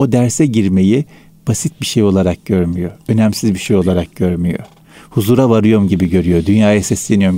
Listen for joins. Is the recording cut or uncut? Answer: uncut